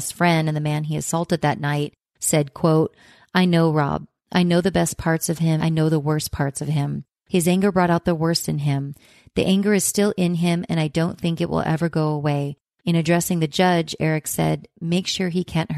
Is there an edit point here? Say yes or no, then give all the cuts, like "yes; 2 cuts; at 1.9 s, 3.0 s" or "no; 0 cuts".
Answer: yes; 1 cut; at 5.6 s